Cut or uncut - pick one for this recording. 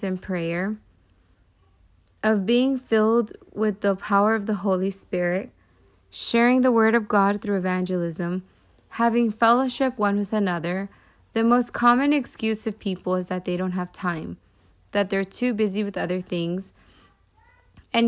uncut